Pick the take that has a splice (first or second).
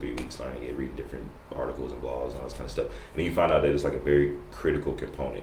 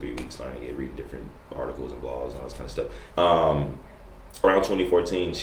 second